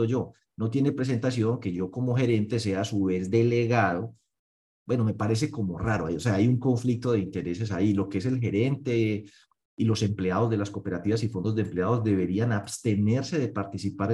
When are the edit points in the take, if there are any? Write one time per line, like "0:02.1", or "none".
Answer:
none